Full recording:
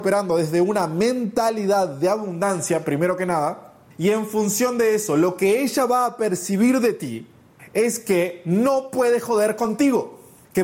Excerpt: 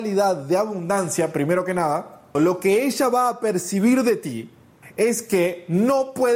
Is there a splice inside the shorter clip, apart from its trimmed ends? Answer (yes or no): yes